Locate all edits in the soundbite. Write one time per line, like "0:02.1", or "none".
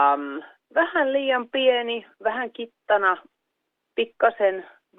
none